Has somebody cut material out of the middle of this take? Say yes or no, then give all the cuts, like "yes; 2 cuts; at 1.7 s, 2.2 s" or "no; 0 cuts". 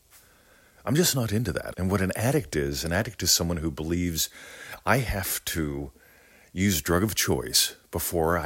yes; 1 cut; at 1.7 s